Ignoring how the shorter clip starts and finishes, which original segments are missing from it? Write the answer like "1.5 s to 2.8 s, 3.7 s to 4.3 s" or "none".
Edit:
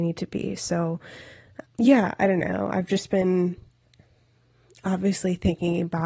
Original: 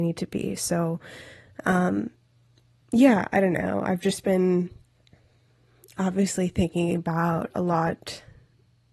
1.6 s to 2.8 s